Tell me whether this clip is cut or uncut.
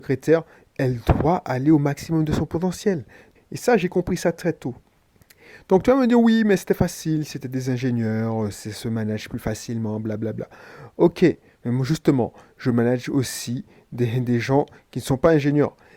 cut